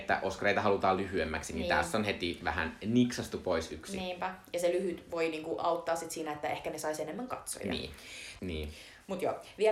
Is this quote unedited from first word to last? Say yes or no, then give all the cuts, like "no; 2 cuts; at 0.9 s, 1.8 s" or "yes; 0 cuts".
no; 1 cut; at 8.4 s